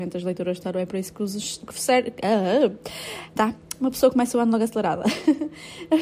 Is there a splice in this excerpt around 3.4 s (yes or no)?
yes